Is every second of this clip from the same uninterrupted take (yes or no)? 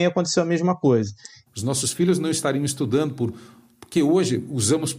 no